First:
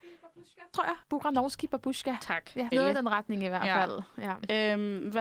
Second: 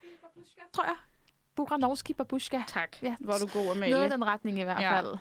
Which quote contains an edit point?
first; 2 cuts; at 1.0 s, 2.7 s

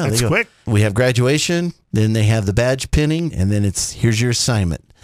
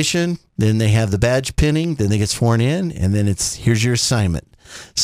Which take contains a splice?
first; 1 cut; at 3.3 s

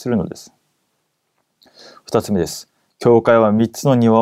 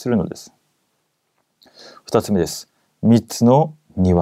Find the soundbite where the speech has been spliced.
first; 1 cut; at 2.9 s

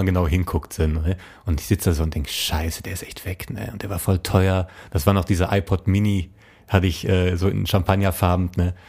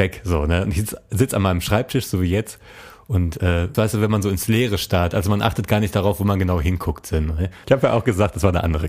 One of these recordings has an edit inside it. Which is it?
second; 2 cuts; at 3.7 s, 7.6 s

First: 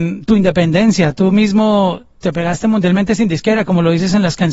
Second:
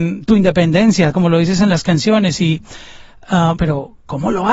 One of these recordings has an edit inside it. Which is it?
second; 2 cuts; at 1.1 s, 3.6 s

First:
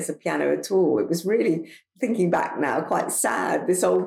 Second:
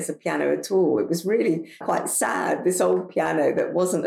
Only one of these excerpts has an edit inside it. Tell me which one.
second; 1 cut; at 1.8 s

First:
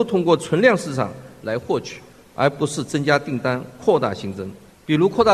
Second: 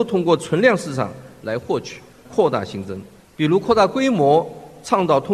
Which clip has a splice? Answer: second; 1 cut; at 2.2 s

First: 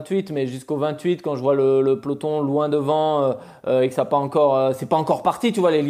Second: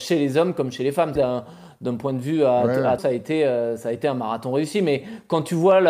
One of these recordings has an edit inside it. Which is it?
second; 2 cuts; at 1.2 s, 3.0 s

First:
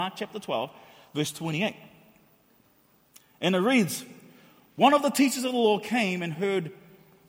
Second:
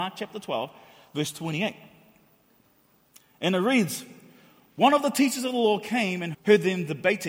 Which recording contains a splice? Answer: second; 1 cut; at 6.3 s

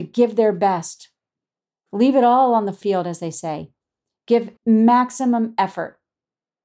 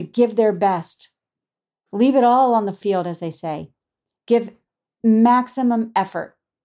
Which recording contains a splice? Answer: first; 1 cut; at 4.6 s

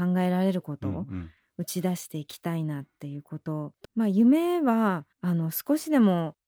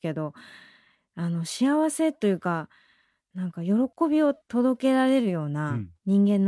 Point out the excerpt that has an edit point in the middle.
first; 2 cuts; at 3.9 s, 5.1 s

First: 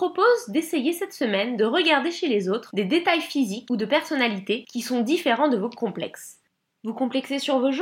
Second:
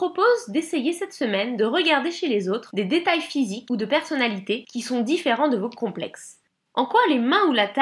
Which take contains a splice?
second; 1 cut; at 6.7 s

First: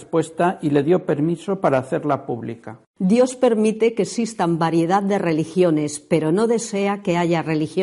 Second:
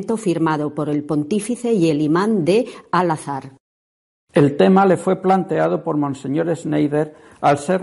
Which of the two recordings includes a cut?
first; 1 cut; at 2.9 s

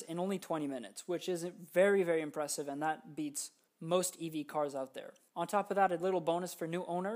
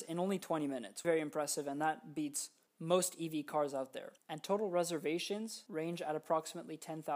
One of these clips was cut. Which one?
second; 2 cuts; at 1.0 s, 4.2 s

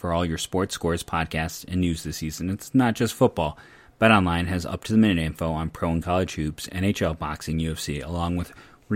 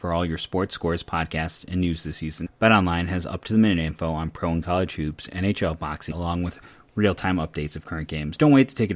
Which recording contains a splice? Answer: second; 2 cuts; at 2.4 s, 6.1 s

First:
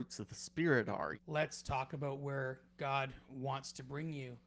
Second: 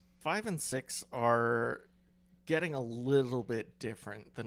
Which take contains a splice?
first; 1 cut; at 1.2 s

